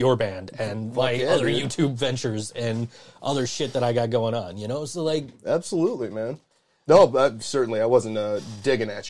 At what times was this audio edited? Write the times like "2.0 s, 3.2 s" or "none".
none